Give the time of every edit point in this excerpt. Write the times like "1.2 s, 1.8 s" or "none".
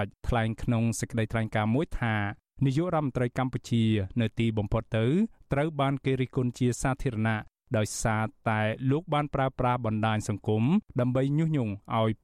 none